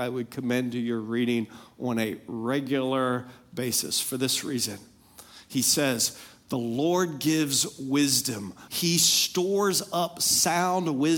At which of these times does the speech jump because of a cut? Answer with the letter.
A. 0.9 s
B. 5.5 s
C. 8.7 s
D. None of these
C